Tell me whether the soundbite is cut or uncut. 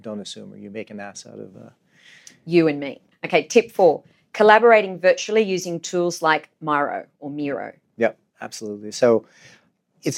cut